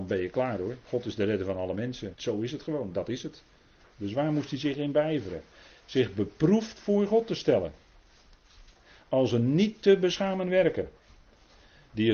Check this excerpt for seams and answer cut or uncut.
cut